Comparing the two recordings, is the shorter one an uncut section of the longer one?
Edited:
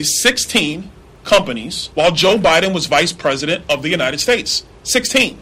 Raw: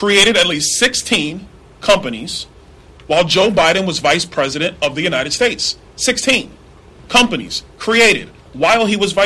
no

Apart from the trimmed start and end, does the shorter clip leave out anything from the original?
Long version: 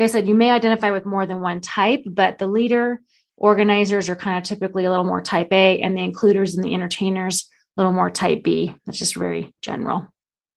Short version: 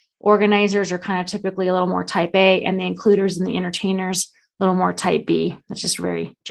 no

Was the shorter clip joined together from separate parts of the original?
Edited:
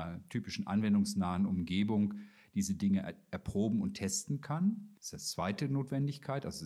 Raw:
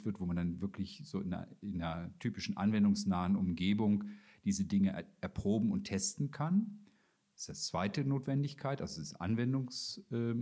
yes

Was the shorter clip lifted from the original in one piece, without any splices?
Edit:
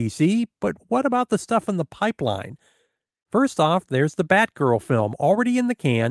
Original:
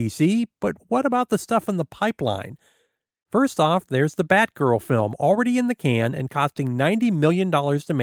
yes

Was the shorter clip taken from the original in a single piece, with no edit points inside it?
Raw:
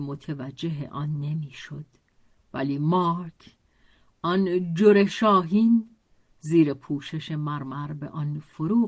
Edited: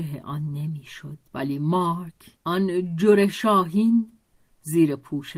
no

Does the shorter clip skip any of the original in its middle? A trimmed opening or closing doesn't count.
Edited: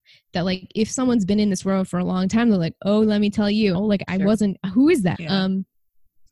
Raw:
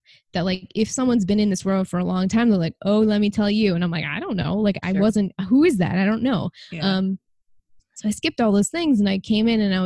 yes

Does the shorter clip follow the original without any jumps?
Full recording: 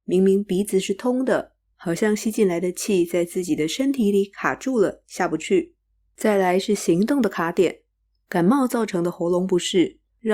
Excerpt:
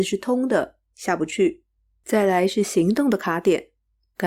no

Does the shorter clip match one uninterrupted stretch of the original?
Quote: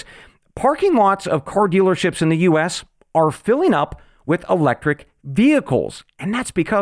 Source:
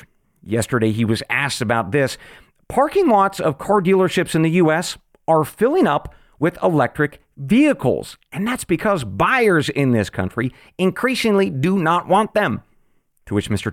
yes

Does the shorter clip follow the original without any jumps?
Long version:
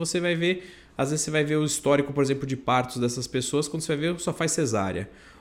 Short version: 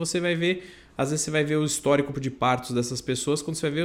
no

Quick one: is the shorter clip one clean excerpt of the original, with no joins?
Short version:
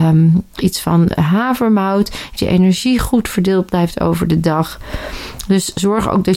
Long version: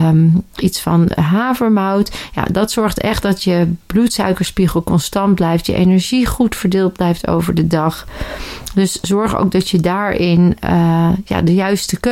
no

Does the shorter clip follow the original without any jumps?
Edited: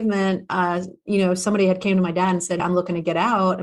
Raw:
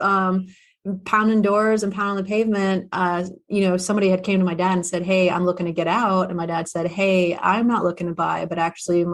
no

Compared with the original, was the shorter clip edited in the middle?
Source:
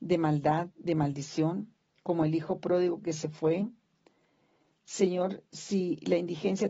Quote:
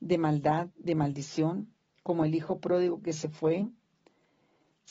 no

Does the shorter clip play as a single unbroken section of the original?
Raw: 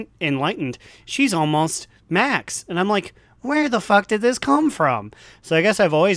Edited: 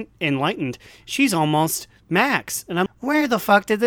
no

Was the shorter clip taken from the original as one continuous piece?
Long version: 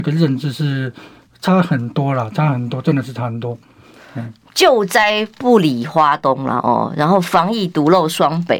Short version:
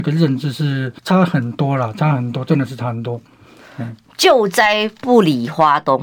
no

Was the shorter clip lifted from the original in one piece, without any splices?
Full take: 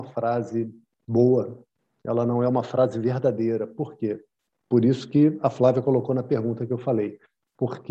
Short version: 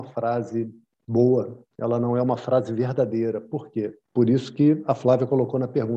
no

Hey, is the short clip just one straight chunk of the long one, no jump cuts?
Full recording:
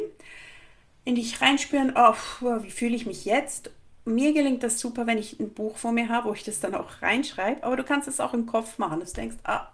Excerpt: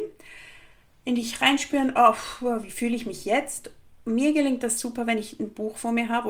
yes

